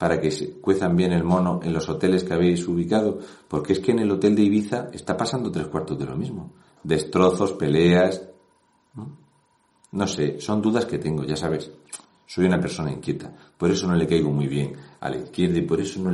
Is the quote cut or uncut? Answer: uncut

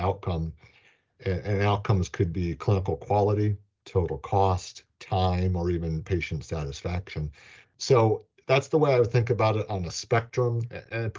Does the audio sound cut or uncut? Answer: cut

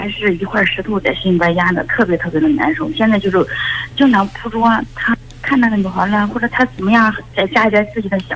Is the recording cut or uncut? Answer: cut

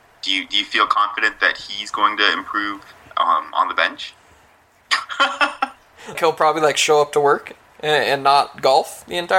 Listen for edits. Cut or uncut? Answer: cut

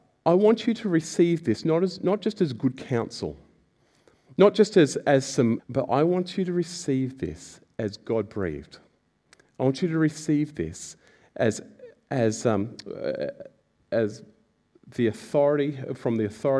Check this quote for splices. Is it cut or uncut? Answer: cut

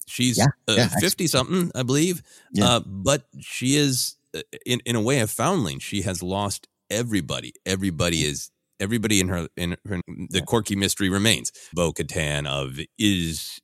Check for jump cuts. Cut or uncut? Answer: cut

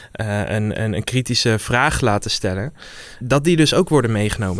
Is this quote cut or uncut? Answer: cut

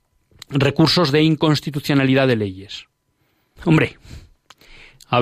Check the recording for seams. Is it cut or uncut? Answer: cut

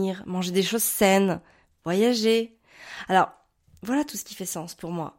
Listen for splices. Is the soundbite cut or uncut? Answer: uncut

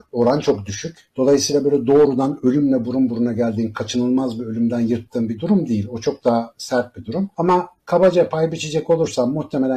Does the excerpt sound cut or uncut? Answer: uncut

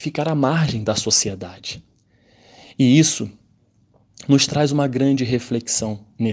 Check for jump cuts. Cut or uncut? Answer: uncut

